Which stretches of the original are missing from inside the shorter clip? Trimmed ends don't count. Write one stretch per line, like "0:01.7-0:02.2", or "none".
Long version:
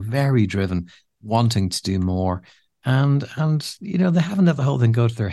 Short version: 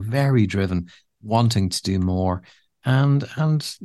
none